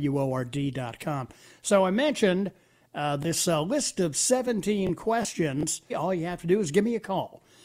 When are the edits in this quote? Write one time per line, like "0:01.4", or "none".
0:05.9